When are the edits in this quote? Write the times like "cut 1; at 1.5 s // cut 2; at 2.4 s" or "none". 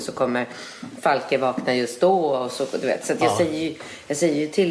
none